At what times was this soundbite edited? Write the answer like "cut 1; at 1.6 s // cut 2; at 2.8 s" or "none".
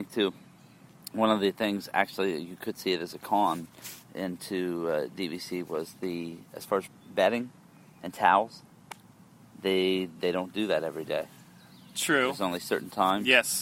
none